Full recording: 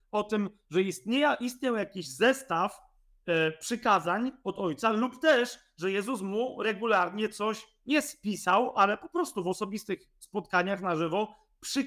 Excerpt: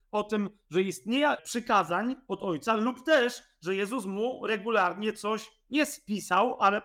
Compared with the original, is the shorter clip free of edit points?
no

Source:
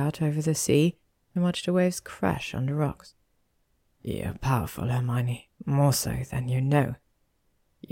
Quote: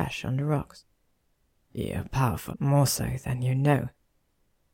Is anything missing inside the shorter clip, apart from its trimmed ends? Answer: yes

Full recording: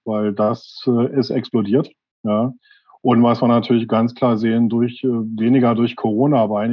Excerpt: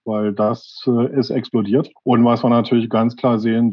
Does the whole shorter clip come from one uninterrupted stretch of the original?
no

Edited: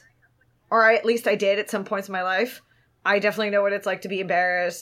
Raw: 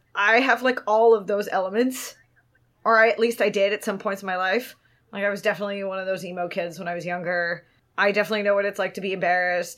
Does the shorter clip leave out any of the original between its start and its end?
yes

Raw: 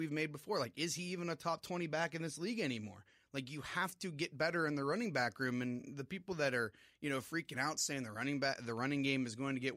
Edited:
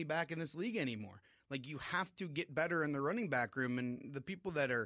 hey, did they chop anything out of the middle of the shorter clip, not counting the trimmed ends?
no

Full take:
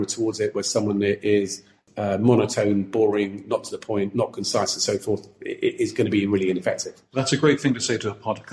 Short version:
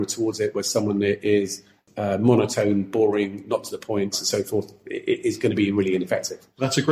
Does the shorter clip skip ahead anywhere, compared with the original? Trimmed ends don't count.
yes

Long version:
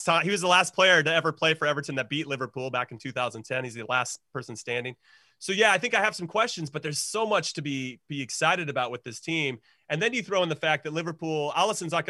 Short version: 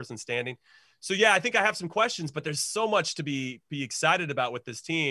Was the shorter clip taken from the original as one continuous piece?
yes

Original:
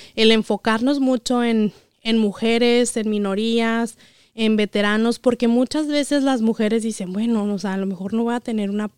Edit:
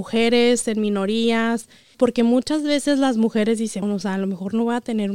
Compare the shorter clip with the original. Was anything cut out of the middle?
yes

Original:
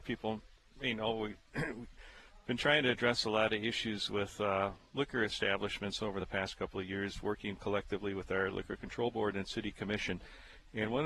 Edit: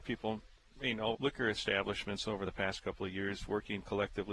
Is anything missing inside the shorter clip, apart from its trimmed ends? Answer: yes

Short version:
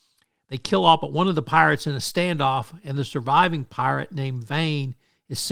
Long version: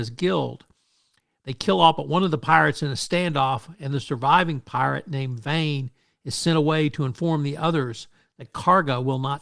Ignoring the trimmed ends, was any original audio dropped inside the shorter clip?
no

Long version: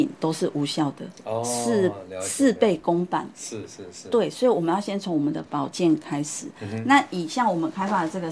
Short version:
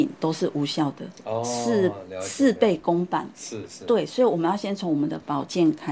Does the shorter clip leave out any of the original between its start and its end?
yes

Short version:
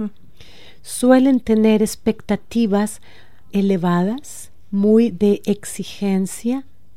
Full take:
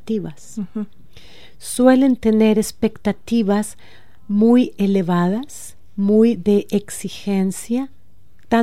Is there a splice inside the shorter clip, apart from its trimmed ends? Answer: yes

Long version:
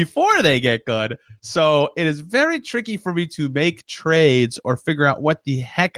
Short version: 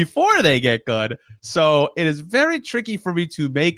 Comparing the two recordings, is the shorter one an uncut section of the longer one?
yes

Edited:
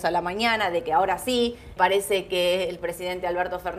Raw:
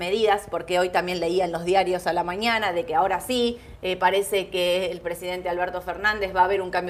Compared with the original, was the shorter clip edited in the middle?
yes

